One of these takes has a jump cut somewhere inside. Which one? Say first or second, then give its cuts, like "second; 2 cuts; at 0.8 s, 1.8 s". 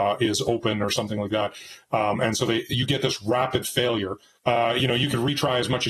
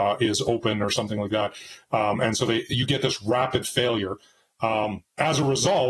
first; 1 cut; at 4.4 s